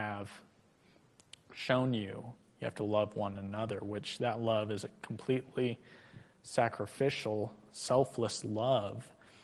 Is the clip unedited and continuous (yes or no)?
yes